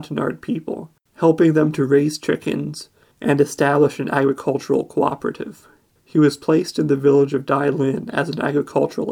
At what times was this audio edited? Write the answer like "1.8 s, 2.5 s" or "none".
1.1 s, 3.1 s, 6.0 s